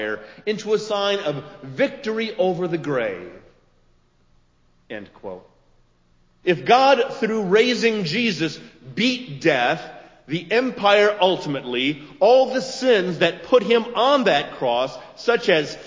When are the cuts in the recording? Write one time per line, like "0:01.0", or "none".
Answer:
0:06.4